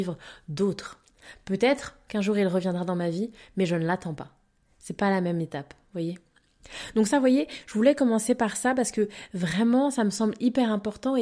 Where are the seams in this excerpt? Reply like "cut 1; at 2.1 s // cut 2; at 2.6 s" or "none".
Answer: none

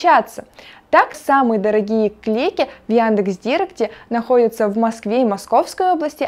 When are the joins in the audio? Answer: cut 1; at 1.1 s

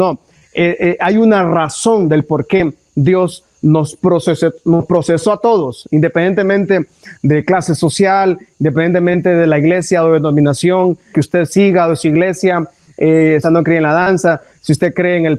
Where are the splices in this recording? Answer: cut 1; at 11.1 s // cut 2; at 13.4 s

